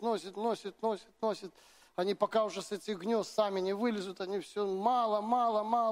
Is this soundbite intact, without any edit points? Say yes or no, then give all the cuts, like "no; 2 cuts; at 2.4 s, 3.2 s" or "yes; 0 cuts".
yes; 0 cuts